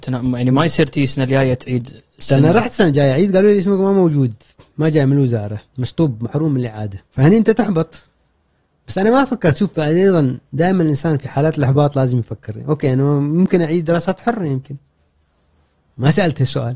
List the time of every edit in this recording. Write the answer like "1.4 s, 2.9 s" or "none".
5.7 s, 7.0 s